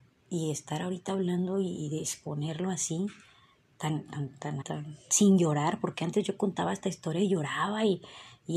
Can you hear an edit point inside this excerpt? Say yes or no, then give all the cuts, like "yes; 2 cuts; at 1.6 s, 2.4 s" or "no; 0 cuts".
yes; 1 cut; at 4.6 s